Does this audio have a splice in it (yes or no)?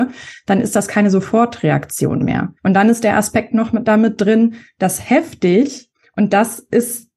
yes